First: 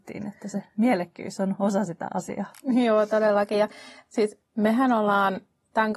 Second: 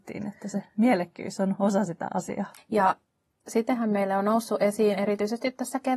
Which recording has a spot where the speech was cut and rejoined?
second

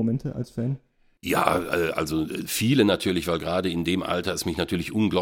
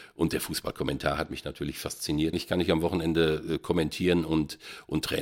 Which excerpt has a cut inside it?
second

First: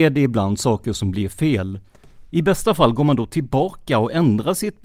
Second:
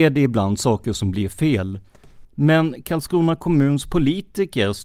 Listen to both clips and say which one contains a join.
second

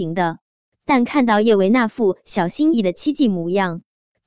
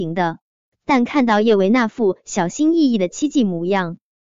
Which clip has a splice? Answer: first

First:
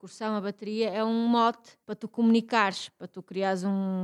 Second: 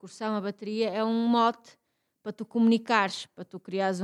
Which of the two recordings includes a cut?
first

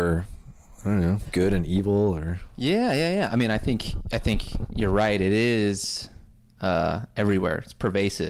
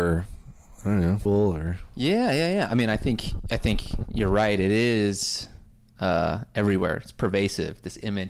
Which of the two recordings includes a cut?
second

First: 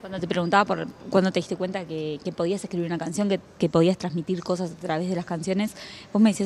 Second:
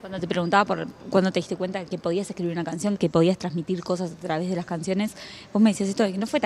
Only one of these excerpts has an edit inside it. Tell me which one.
second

